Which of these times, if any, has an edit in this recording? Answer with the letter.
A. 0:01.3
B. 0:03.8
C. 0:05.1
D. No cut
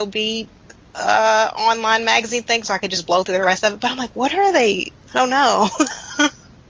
C